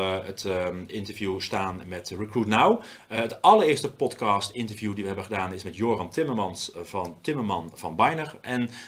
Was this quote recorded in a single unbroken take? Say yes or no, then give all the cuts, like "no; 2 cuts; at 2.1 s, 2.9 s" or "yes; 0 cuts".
yes; 0 cuts